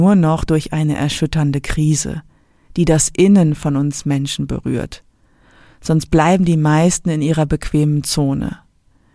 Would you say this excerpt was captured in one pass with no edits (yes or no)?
yes